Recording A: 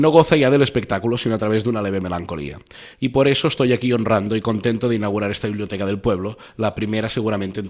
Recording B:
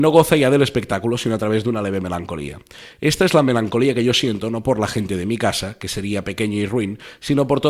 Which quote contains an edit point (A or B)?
A